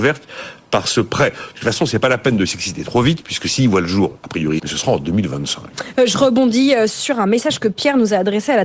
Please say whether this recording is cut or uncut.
cut